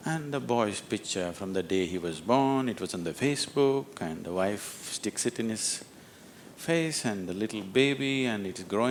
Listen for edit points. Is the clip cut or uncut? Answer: uncut